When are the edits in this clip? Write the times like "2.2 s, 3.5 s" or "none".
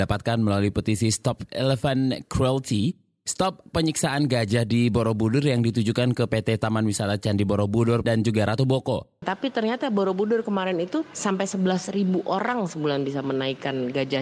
8.0 s, 9.2 s